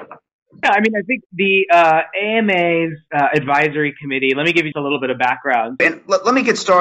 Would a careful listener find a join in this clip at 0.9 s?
no; 2 cuts; at 4.7 s, 5.8 s

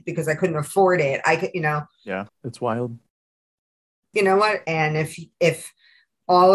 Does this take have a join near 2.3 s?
yes; 2 cuts; at 2.3 s, 4.6 s

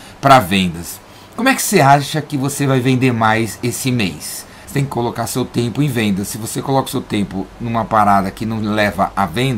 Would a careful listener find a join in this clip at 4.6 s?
yes; 1 cut; at 4.6 s

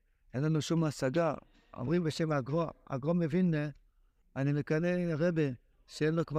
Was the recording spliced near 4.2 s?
yes; 1 cut; at 4.2 s

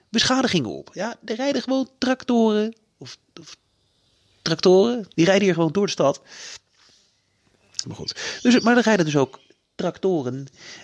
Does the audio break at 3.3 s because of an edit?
no; 2 cuts; at 5.1 s, 7.8 s

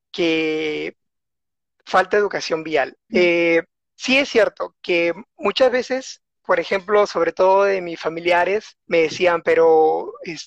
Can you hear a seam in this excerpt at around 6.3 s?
no; 2 cuts; at 3.1 s, 8.8 s

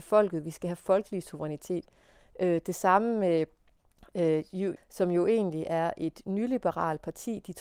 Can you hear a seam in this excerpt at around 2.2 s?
yes; 2 cuts; at 2.2 s, 4.8 s

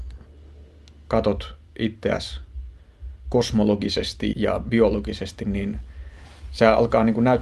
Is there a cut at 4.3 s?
yes; 1 cut; at 4.3 s

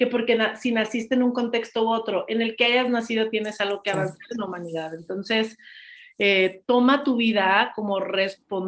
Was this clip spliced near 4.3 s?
no; 0 cuts

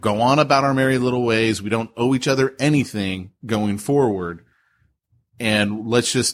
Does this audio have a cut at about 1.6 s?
no; 0 cuts

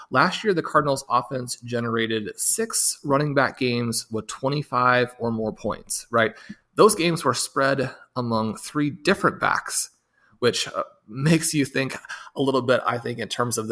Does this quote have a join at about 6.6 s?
no; 0 cuts

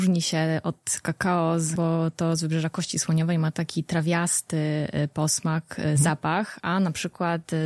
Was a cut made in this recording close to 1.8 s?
yes; 1 cut; at 1.8 s

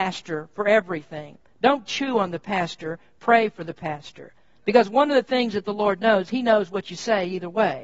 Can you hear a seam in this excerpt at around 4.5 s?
no; 0 cuts

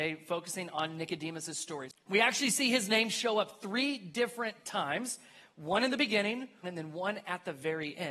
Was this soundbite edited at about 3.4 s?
no; 2 cuts; at 1.9 s, 6.6 s

